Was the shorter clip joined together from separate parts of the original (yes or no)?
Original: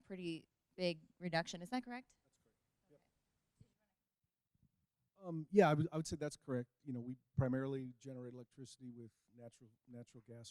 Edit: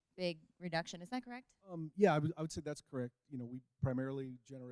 yes